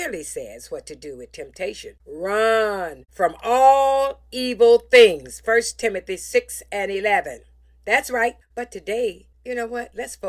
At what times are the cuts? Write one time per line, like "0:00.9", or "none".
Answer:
0:08.4